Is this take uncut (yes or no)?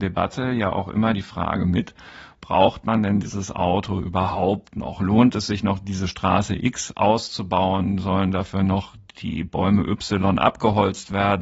yes